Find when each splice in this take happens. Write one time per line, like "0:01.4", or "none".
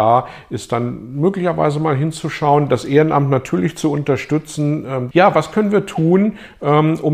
0:05.1